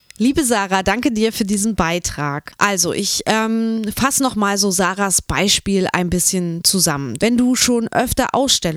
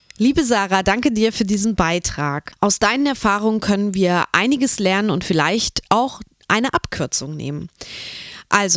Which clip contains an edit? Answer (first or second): first